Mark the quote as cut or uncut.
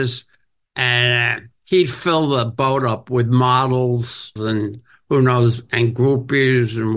cut